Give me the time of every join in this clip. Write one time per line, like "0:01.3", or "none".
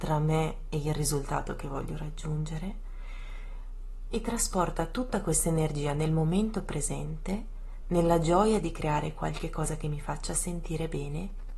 none